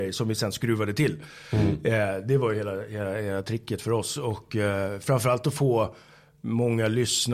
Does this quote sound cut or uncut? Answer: uncut